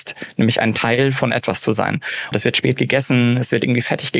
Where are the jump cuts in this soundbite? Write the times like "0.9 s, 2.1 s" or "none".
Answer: 2.3 s